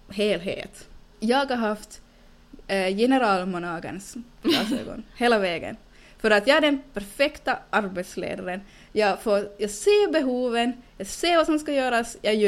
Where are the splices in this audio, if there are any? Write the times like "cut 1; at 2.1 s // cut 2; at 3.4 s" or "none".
cut 1; at 1.1 s

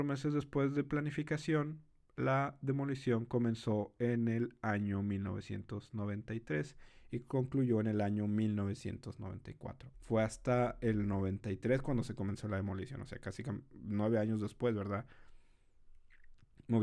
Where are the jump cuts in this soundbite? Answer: cut 1; at 9.9 s

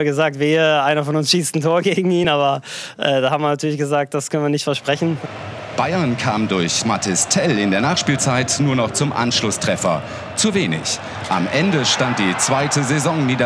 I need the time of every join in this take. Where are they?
none

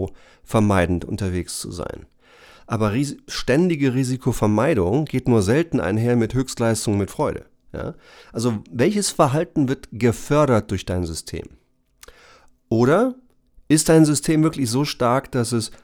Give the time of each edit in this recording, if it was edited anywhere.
none

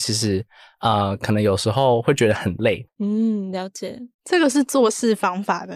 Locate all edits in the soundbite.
cut 1; at 2.9 s

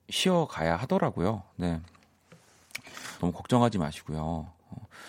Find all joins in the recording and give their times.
cut 1; at 3.2 s

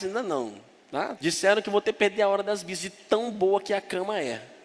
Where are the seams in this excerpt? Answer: cut 1; at 1.2 s

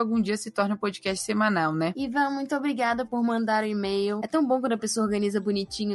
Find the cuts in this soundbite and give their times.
none

